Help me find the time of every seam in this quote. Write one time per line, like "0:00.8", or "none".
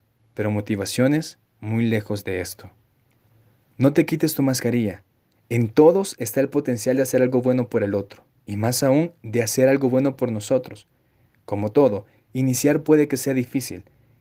0:05.4